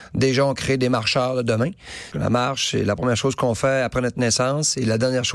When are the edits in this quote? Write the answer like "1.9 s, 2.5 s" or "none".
2.1 s